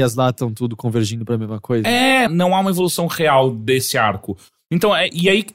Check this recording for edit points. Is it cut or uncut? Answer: cut